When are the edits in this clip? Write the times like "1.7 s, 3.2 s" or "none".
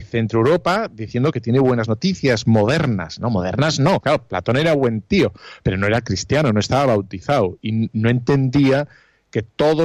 4.0 s